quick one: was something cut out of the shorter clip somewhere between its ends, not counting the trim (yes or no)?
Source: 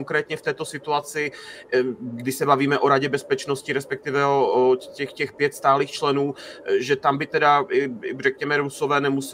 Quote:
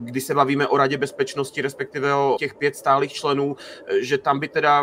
yes